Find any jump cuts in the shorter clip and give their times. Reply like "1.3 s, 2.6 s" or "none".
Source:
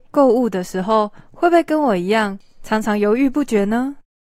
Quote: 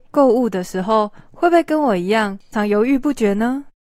2.5 s